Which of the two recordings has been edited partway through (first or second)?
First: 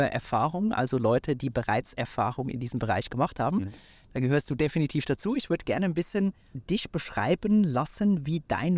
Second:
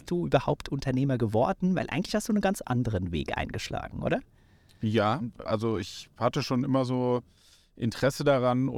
second